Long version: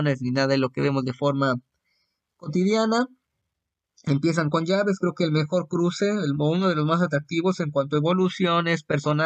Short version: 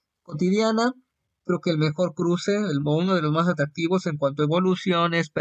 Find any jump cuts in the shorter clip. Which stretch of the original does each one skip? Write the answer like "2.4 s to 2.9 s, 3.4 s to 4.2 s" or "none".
3.6 s to 5.0 s